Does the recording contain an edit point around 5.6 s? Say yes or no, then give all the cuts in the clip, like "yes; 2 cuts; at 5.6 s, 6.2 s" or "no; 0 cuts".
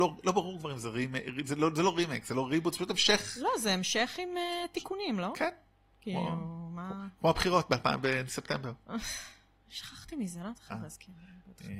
no; 0 cuts